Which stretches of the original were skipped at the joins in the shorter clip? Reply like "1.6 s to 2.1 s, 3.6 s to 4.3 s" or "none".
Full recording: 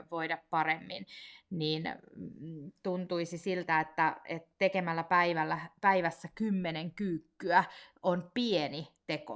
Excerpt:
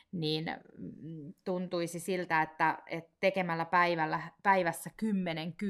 none